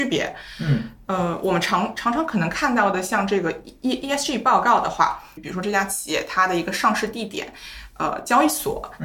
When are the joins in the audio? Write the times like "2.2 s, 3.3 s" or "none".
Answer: 5.4 s

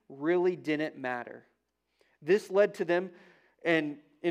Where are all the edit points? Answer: none

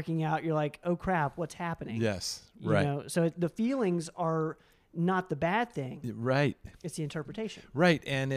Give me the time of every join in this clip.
none

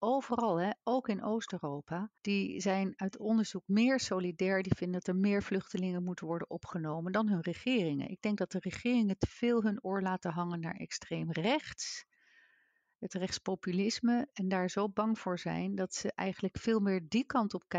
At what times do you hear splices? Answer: 2.2 s

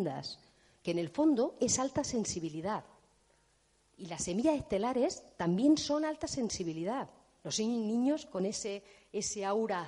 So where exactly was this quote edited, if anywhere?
7.4 s

